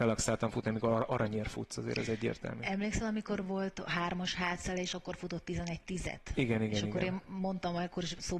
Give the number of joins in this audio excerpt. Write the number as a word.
zero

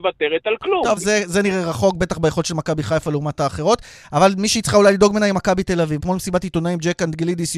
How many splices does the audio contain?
two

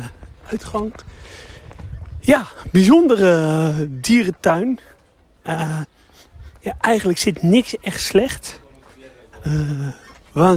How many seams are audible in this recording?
one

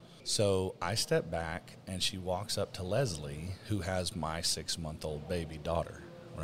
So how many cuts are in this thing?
zero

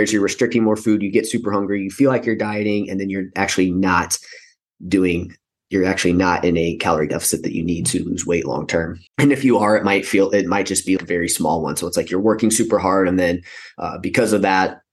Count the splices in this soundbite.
two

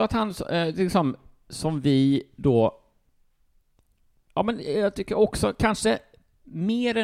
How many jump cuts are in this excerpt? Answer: zero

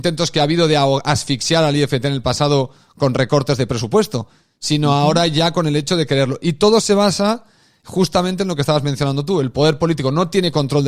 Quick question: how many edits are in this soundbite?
zero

